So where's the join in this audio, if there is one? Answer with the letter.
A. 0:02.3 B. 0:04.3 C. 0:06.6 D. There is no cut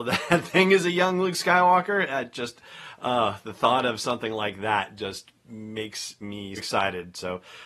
C